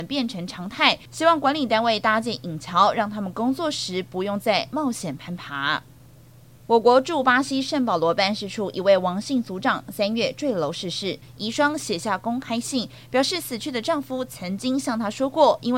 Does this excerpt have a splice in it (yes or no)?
no